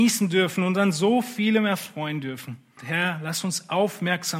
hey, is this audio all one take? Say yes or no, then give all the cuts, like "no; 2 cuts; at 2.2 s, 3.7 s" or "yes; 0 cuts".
no; 1 cut; at 2.8 s